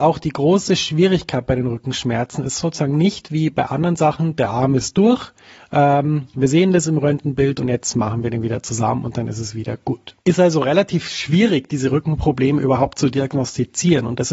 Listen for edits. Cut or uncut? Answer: uncut